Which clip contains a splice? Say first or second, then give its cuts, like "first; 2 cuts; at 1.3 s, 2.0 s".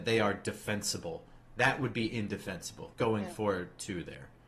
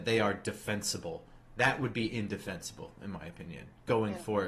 first; 1 cut; at 2.9 s